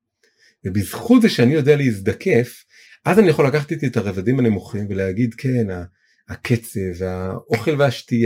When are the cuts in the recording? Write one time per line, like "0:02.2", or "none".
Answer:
none